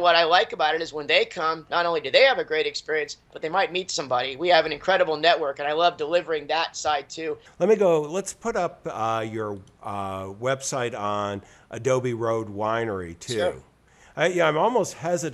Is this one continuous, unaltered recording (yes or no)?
no